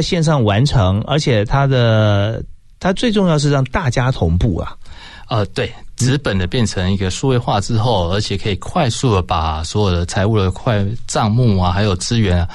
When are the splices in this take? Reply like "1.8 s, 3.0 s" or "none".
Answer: 2.9 s